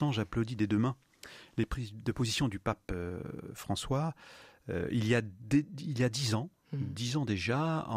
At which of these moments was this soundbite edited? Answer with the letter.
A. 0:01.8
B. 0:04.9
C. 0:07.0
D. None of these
D